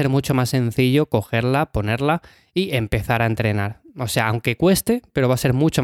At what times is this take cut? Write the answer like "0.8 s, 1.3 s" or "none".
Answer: none